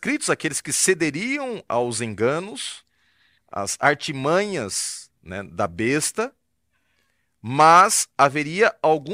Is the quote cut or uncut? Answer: cut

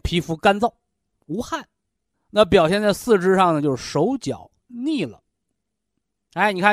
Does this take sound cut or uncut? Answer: cut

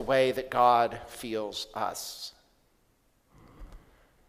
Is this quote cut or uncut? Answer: uncut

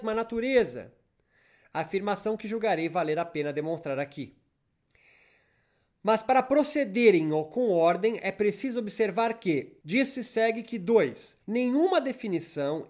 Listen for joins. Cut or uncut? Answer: cut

